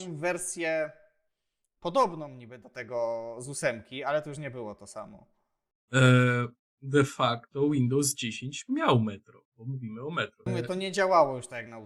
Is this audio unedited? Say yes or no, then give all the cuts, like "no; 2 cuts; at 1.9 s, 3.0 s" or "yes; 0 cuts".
no; 1 cut; at 10.5 s